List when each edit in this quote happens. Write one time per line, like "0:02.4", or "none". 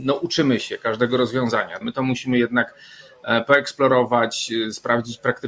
0:01.8